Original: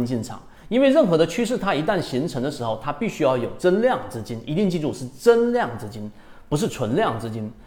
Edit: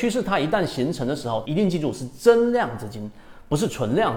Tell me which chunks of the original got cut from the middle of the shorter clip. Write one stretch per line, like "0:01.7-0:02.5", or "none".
0:02.8-0:04.5